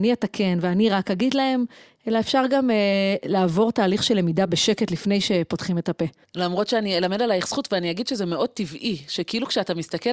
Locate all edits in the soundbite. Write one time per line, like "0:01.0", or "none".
none